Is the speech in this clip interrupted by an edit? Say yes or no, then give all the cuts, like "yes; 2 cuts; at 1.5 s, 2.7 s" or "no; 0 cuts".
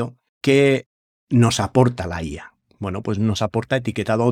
no; 0 cuts